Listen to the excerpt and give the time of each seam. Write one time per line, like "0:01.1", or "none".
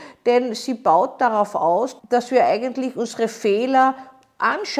0:02.0